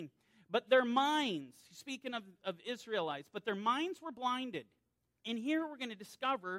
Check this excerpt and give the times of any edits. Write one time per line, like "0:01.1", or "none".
0:02.4
0:05.2